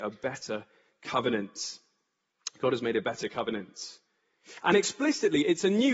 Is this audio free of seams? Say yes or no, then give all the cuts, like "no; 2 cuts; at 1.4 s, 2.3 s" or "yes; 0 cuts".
yes; 0 cuts